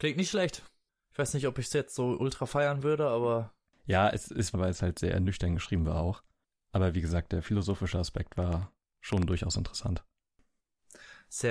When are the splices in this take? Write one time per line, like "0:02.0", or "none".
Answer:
0:04.5